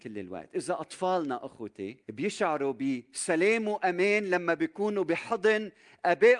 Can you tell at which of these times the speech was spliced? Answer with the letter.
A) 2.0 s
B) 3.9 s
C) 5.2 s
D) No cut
A